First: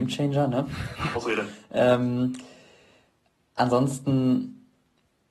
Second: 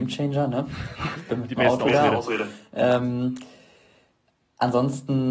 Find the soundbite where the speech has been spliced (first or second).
first